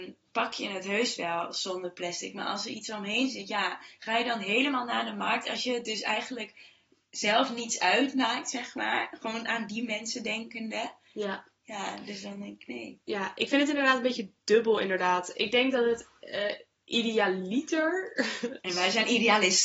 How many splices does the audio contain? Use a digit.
0